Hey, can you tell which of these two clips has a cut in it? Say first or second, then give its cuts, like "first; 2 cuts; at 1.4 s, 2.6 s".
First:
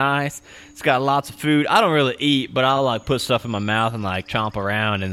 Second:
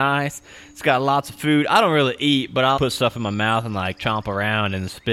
second; 1 cut; at 2.8 s